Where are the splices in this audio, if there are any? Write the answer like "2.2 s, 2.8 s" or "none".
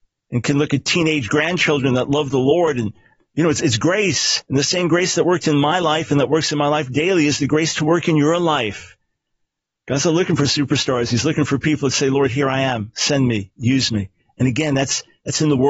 none